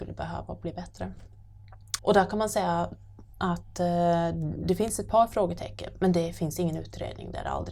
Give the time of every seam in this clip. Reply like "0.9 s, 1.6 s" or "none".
2.0 s